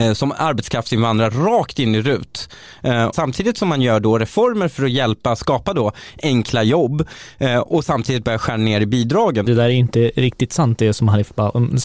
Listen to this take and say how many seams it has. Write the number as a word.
two